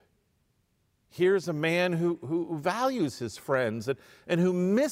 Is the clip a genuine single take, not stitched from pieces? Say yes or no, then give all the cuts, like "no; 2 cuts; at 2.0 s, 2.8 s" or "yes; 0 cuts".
yes; 0 cuts